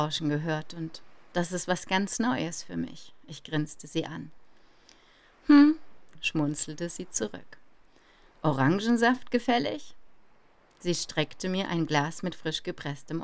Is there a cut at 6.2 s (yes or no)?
yes